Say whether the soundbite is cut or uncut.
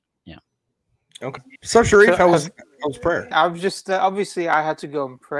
cut